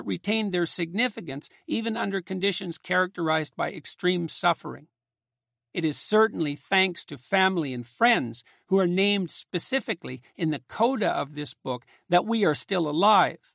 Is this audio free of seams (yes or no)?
yes